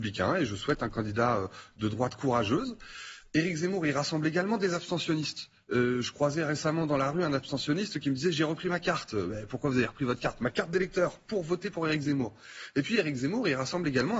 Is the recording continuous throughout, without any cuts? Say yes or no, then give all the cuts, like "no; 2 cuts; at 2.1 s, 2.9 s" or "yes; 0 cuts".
yes; 0 cuts